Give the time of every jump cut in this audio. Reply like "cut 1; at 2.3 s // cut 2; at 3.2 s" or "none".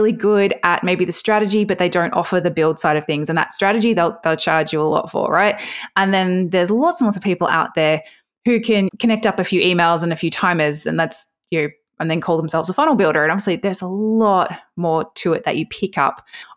none